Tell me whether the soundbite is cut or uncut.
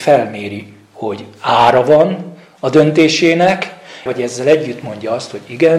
cut